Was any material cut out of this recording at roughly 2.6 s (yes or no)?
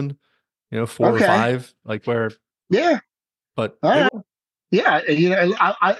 no